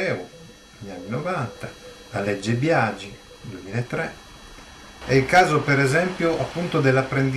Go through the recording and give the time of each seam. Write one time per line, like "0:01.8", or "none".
0:05.0